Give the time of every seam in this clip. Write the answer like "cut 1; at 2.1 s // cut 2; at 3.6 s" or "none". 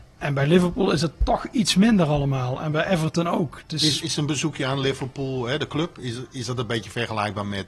none

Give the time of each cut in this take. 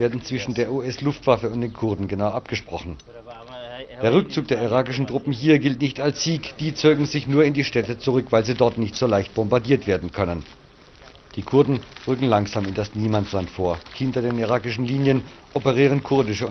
none

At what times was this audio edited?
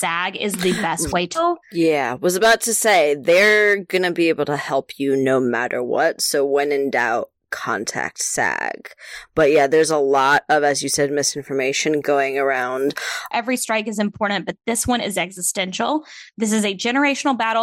cut 1; at 1.3 s // cut 2; at 13.3 s

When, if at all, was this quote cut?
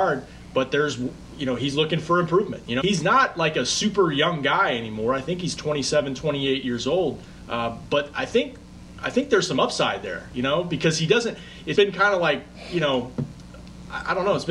cut 1; at 2.8 s // cut 2; at 11.8 s

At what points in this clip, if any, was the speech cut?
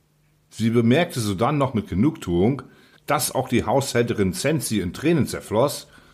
cut 1; at 2.9 s

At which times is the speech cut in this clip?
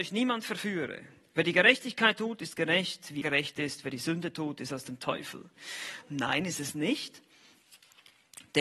cut 1; at 3.2 s // cut 2; at 6.0 s

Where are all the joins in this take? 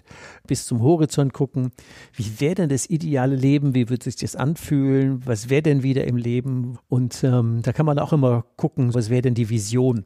cut 1; at 6.8 s // cut 2; at 8.9 s

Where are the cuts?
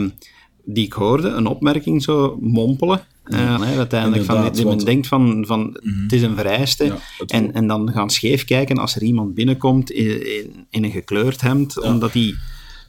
cut 1; at 3.6 s

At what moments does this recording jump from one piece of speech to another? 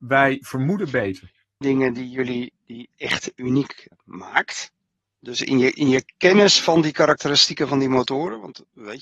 cut 1; at 1.6 s // cut 2; at 3.9 s

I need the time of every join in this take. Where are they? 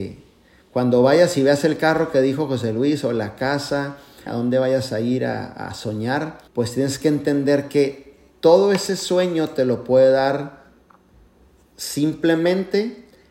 cut 1; at 4.3 s // cut 2; at 6.5 s

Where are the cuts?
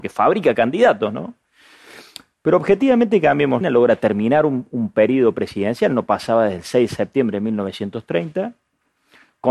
cut 1; at 3.6 s

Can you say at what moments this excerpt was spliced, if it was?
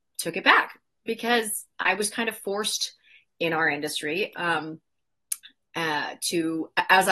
none

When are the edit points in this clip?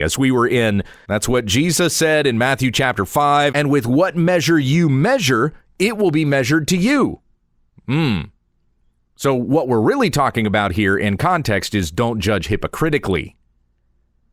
cut 1; at 1.0 s // cut 2; at 3.5 s

